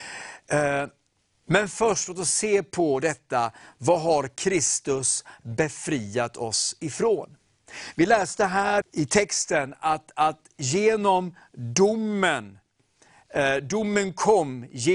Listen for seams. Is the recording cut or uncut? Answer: cut